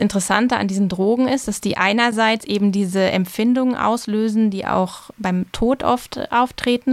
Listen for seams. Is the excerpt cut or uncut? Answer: uncut